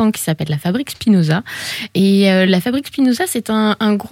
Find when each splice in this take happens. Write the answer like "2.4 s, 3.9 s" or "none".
none